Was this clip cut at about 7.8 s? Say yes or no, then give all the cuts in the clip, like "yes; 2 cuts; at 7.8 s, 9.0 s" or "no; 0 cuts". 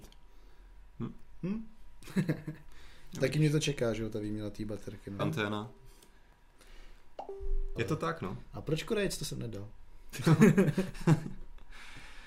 yes; 3 cuts; at 5.2 s, 7.8 s, 10.1 s